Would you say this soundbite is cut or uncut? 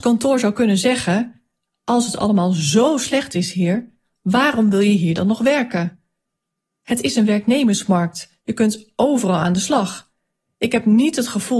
uncut